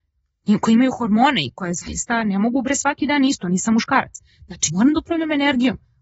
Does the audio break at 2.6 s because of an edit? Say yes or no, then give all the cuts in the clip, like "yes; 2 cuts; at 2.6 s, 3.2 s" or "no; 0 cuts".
no; 1 cut; at 4.7 s